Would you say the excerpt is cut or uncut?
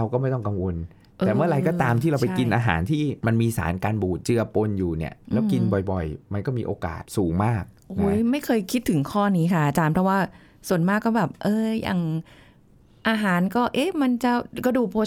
uncut